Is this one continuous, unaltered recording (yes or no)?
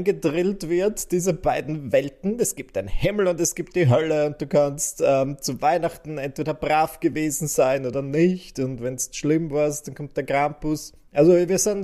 yes